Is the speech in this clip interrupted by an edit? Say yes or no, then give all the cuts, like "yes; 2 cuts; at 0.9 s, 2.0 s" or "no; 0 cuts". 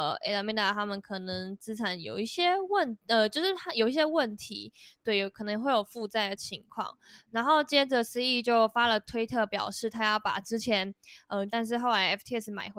yes; 1 cut; at 11.5 s